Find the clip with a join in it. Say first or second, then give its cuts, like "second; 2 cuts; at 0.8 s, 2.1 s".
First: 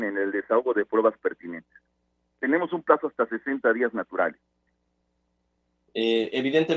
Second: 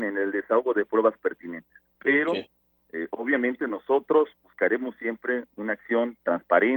second; 1 cut; at 1.9 s